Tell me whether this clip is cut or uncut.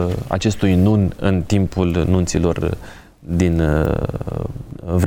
uncut